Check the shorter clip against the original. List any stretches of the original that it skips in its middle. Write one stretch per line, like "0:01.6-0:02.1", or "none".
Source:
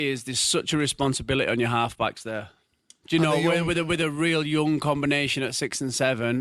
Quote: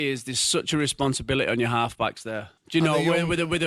0:02.6-0:02.9